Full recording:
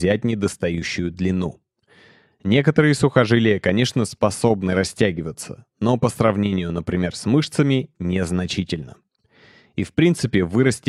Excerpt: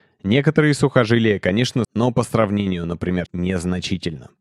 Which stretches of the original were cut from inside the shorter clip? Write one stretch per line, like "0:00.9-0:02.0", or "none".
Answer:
0:04.1-0:05.7
0:07.1-0:07.9

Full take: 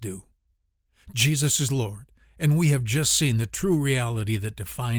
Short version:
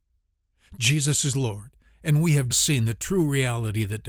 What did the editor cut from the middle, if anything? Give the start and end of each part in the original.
0:02.9-0:03.0

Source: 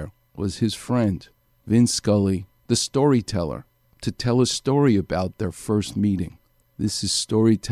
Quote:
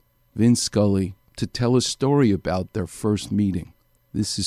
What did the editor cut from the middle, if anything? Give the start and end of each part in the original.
0:02.5-0:03.9

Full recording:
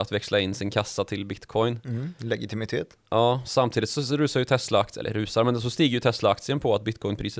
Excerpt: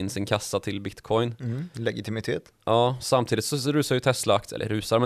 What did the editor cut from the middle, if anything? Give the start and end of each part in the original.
none

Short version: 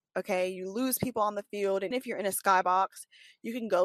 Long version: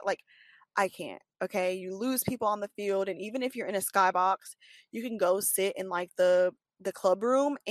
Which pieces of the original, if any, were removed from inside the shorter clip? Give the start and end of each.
0:03.2-0:03.4

